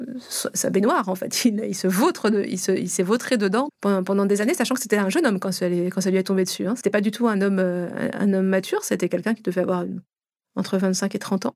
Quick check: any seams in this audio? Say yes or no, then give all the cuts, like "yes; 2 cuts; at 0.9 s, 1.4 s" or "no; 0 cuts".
no; 0 cuts